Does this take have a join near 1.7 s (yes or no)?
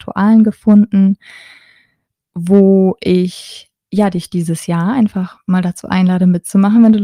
no